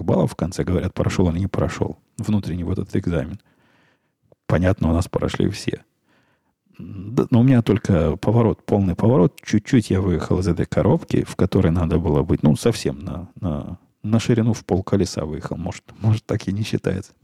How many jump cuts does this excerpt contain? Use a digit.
0